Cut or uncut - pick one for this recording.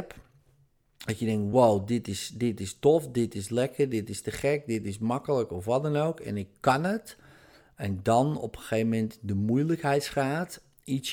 uncut